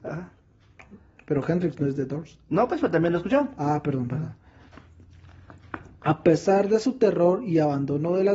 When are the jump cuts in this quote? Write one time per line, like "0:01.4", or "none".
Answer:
none